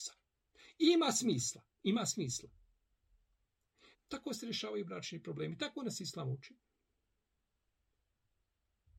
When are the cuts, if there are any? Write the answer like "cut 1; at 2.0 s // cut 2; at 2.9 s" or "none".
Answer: cut 1; at 3.9 s